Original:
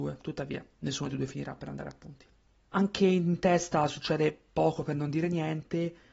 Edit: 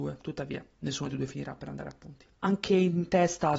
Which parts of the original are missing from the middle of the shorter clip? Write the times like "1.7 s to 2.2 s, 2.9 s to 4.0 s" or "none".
2.3 s to 2.7 s